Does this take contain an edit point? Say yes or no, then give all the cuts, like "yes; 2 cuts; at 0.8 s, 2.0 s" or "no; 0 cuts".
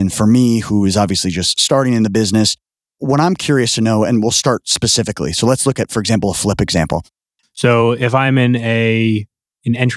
yes; 1 cut; at 7.4 s